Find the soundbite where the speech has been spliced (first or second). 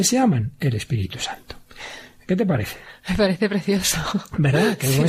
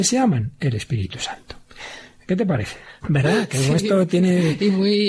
second